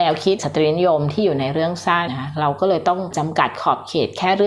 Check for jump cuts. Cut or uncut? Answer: cut